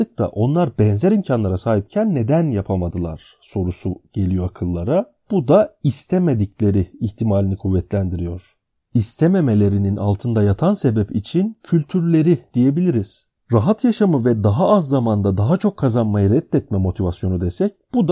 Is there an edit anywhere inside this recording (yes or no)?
yes